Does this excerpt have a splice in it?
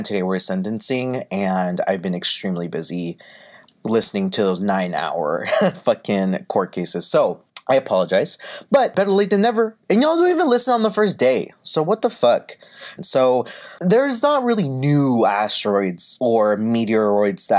yes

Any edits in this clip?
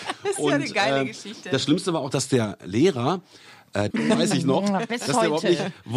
yes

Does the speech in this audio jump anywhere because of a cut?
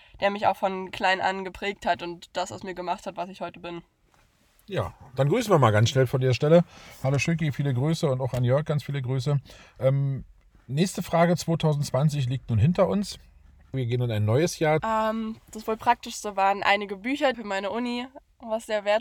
yes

